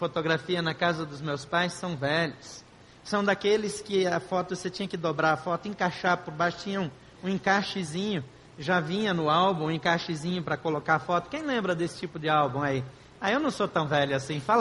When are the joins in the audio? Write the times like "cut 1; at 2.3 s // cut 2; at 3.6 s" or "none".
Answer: none